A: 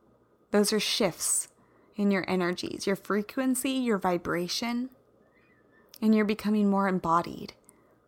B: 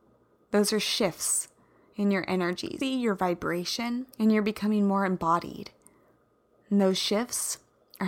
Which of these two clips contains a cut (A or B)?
B